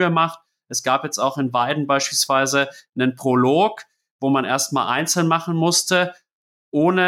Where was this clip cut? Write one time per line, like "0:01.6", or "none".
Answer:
none